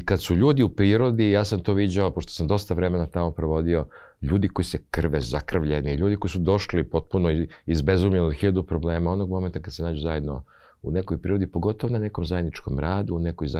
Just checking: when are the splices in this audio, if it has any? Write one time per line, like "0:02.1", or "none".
none